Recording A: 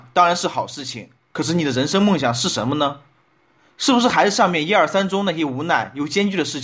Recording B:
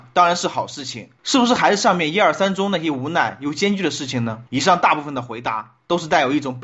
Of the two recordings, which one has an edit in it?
B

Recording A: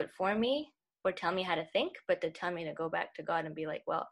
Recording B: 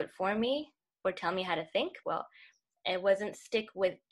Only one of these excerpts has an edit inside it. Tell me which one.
B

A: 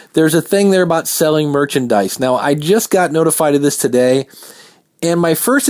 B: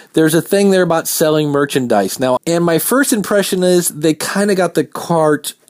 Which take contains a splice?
B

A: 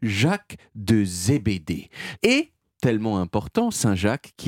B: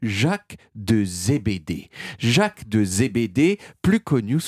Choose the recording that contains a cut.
A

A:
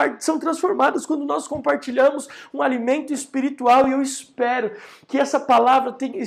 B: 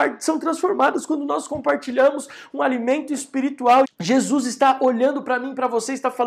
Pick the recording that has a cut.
B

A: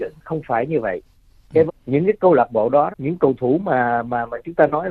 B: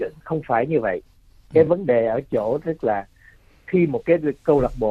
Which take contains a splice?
A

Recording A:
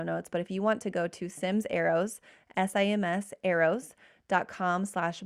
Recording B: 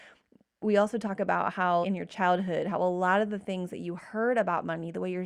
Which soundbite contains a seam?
B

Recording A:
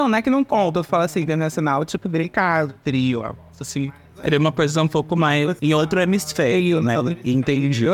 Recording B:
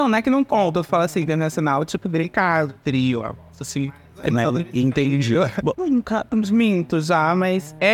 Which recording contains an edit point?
B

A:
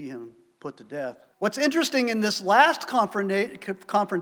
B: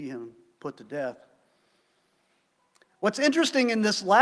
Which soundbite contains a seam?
A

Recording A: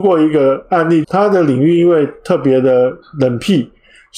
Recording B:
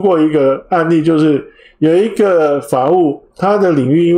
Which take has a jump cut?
A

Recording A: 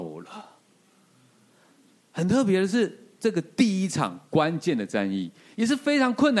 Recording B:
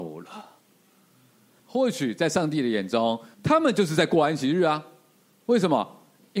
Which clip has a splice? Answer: B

